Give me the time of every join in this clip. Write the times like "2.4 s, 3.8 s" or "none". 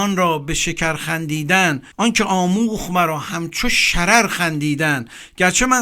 1.9 s